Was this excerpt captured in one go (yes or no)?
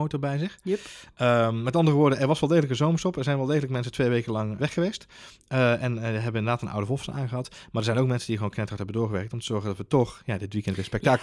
no